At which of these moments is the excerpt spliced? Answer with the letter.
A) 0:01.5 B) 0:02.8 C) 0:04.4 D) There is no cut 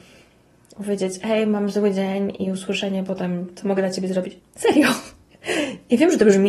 C